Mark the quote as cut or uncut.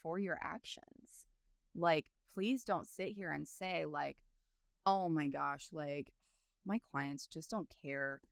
uncut